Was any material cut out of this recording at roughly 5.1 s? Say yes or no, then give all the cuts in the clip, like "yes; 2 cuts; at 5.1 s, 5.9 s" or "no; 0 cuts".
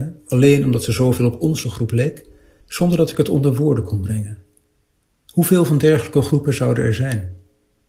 no; 1 cut; at 2.6 s